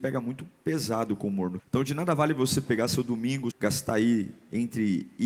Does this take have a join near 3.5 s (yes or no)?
yes